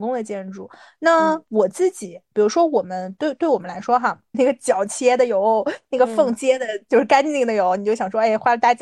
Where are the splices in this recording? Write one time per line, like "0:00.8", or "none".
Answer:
0:04.3